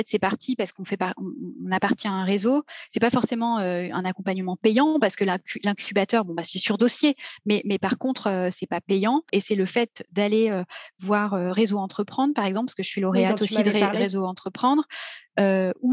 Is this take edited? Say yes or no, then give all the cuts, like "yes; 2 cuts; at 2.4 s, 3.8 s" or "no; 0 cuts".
yes; 1 cut; at 9.3 s